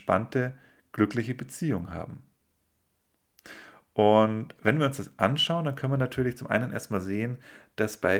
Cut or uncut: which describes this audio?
uncut